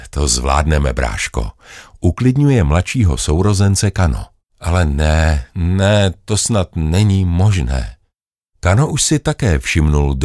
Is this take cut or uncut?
cut